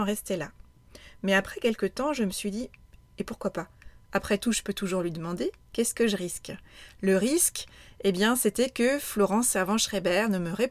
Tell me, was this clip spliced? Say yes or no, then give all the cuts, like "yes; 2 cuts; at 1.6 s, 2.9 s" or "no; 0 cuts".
no; 0 cuts